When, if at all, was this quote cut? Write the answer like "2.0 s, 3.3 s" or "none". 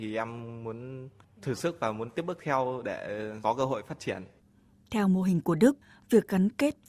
none